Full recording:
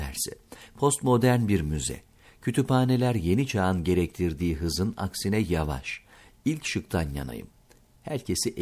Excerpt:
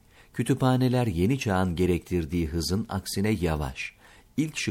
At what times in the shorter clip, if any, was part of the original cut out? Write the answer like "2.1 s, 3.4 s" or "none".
none